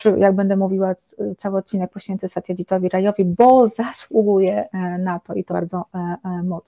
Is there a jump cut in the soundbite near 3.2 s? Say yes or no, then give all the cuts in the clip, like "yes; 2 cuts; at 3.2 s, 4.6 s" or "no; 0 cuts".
no; 1 cut; at 5.5 s